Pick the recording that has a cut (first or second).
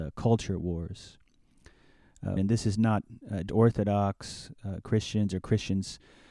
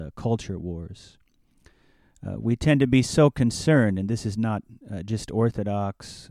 first